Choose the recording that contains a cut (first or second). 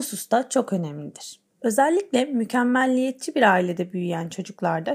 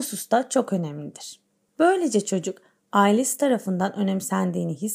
first